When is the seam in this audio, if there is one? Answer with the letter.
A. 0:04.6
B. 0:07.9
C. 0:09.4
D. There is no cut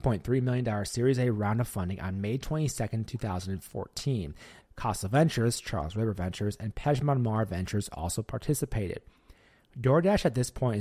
A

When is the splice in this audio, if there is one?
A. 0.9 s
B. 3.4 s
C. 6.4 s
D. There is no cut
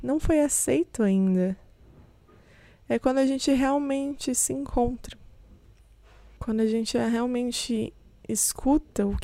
D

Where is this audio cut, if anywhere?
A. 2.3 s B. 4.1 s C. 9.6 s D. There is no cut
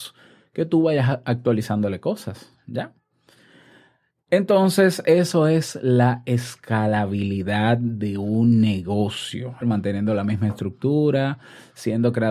C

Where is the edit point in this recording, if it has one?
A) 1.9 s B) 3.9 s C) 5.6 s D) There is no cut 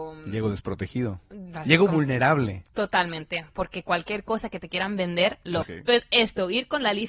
C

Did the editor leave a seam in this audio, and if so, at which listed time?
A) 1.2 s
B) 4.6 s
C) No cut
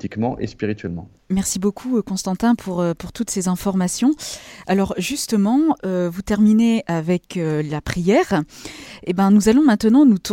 A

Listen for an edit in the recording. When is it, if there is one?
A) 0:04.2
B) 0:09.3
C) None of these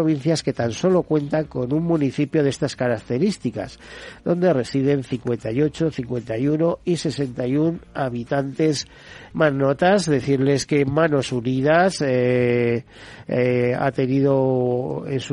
B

